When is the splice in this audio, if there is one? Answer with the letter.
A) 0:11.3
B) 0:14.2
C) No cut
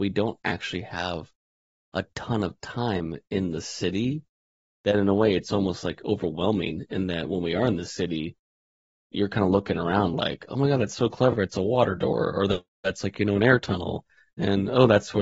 C